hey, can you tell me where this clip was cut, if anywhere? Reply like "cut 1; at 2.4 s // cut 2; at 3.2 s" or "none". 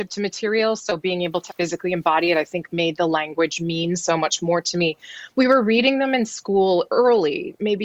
cut 1; at 1.5 s